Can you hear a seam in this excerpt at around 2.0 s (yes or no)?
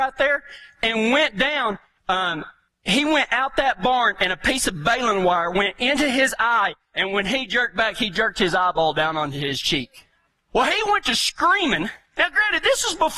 yes